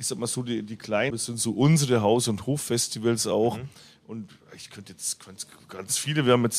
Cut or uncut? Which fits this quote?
cut